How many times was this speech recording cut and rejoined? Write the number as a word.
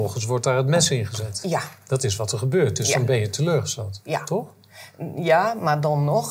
zero